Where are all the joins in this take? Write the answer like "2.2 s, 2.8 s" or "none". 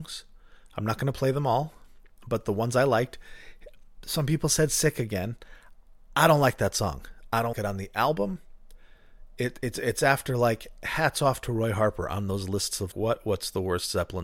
7.5 s, 12.9 s